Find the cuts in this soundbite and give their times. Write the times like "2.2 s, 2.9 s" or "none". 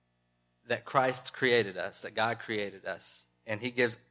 none